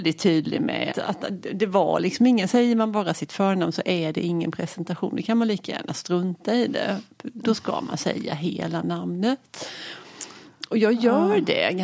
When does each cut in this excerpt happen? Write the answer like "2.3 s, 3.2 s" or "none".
0.9 s

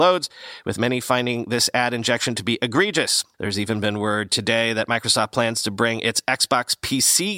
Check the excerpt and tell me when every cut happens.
3.3 s

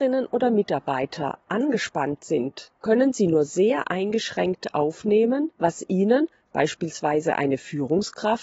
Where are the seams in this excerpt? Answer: 2.8 s

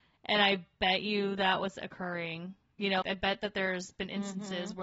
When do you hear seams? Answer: 3.0 s

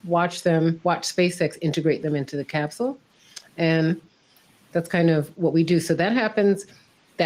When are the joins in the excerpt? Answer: none

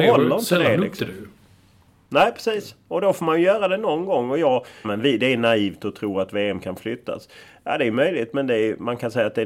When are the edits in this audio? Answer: 4.8 s

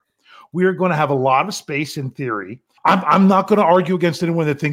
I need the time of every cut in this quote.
2.8 s

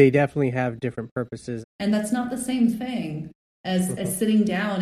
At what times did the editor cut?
1.6 s

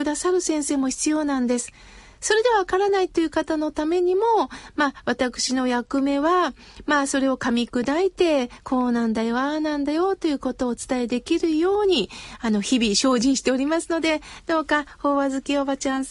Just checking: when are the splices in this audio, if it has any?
none

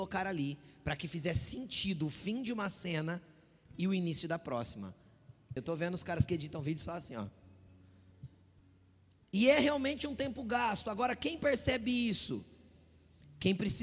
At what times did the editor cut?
5.6 s

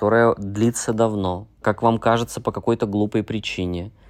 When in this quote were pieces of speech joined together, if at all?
1.6 s

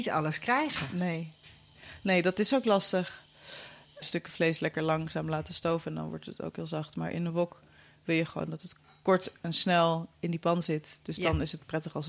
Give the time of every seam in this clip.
4.0 s

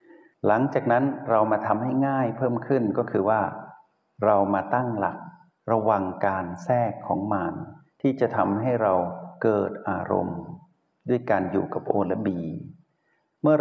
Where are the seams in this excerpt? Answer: none

